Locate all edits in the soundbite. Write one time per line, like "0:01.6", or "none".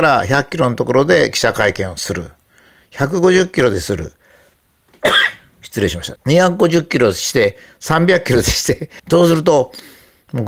0:06.2
0:09.0